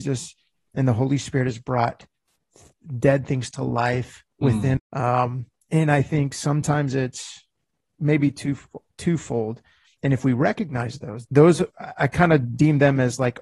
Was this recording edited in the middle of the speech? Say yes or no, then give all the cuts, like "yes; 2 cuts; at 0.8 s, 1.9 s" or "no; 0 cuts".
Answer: yes; 3 cuts; at 4.8 s, 9.9 s, 11.3 s